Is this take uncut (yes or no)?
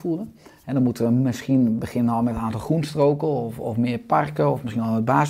yes